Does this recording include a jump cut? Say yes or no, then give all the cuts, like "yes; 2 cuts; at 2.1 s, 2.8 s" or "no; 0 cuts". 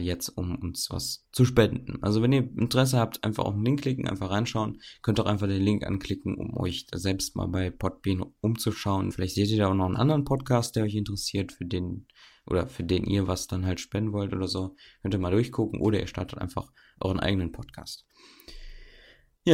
yes; 1 cut; at 9.1 s